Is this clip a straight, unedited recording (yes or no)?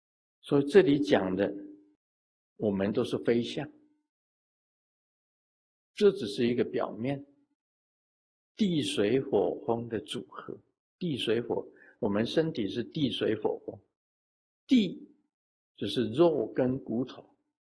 yes